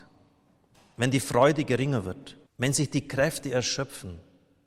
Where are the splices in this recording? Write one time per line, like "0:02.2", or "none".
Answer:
0:02.5